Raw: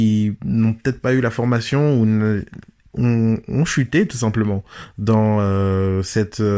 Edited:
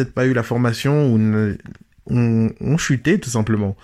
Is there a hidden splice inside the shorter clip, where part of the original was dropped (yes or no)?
no